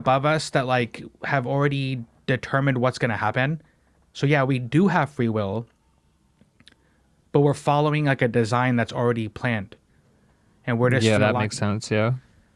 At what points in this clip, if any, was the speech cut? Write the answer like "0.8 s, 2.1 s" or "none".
11.2 s